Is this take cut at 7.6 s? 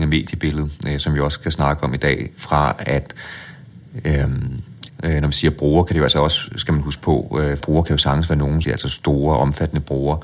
yes; 3 cuts; at 4.9 s, 7.6 s, 8.6 s

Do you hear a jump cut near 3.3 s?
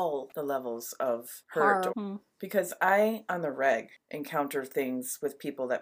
no; 1 cut; at 1.9 s

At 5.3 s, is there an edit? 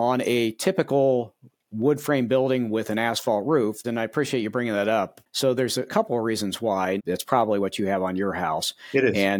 no; 2 cuts; at 3.8 s, 7.0 s

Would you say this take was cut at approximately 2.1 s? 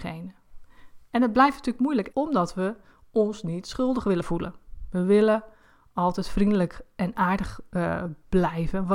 yes; 1 cut; at 2.1 s

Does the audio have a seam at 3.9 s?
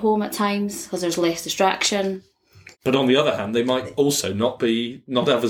no; 1 cut; at 2.7 s

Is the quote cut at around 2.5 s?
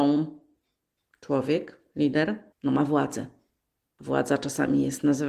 yes; 2 cuts; at 1.0 s, 2.5 s

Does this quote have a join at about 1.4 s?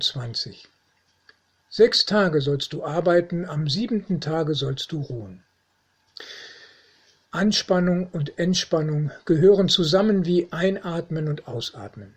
no; 1 cut; at 7.3 s

